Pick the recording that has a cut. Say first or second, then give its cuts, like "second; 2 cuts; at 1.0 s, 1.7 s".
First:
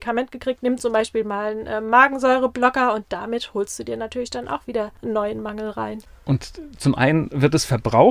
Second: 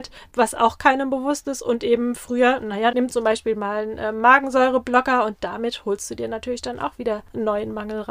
second; 1 cut; at 2.9 s